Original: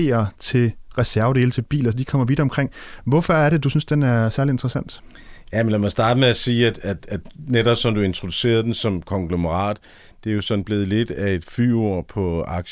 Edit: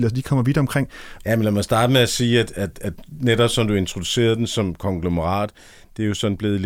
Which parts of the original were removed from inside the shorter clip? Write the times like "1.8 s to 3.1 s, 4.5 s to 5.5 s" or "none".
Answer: 3.0 s to 5.4 s